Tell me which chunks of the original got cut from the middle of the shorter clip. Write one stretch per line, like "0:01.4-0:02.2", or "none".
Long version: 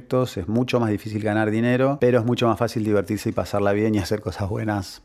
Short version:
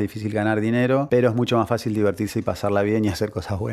none